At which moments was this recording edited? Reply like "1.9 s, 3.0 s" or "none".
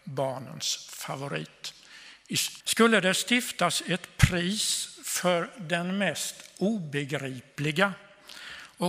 2.6 s